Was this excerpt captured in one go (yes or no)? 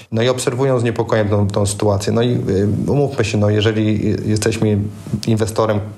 yes